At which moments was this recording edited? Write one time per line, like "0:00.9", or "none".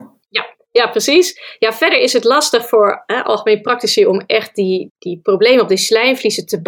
0:04.9

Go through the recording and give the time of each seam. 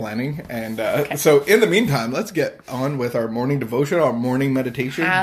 none

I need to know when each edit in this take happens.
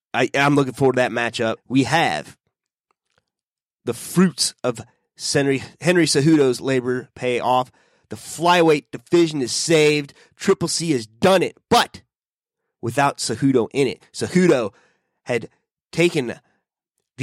0:01.6

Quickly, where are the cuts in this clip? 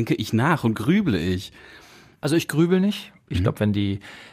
0:02.1
0:03.3

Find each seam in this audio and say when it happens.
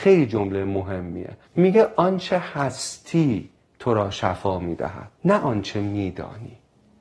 0:01.4
0:05.2

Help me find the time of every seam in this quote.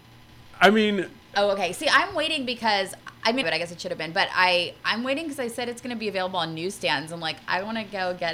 0:01.3
0:03.4

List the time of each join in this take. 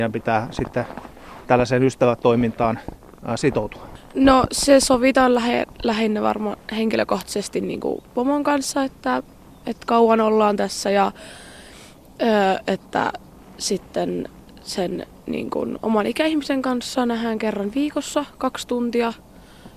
none

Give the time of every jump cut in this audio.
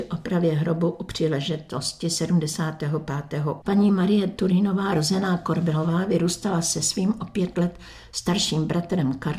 0:03.6

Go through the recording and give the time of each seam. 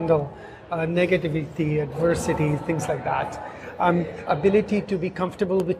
0:04.3

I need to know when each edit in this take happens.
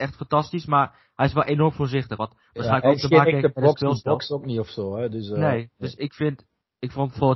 none

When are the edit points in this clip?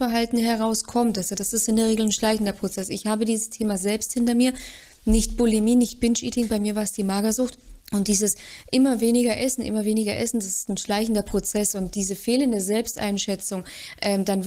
0:07.8

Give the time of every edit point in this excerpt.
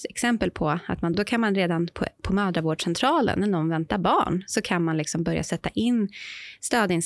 0:01.1

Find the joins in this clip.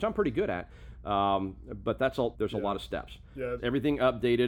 0:02.3
0:03.6

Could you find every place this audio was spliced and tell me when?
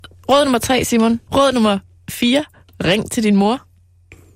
0:01.3

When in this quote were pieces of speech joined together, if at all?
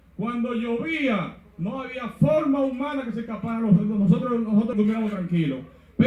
0:04.7

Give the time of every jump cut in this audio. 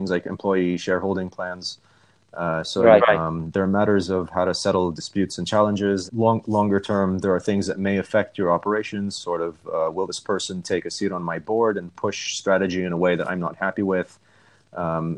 0:03.0
0:06.1

